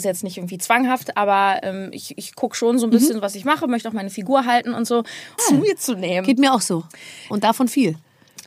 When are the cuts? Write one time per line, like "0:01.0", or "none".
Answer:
0:05.4
0:07.3